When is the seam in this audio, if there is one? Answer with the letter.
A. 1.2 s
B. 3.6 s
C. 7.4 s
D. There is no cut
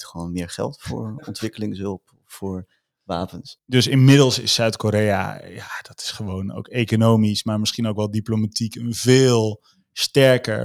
B